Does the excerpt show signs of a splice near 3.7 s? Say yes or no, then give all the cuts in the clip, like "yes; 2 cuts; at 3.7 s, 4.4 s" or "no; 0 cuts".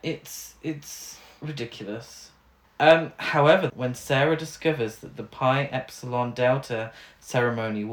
yes; 2 cuts; at 2.6 s, 3.7 s